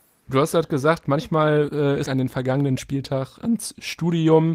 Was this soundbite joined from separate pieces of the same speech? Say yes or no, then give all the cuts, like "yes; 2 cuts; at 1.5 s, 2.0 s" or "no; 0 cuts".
yes; 1 cut; at 2.0 s